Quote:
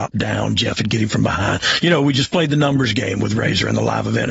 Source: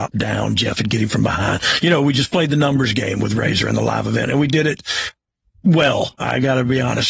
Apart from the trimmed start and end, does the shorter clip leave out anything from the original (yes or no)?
no